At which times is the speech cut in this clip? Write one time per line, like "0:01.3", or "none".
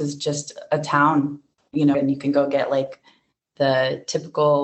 0:01.9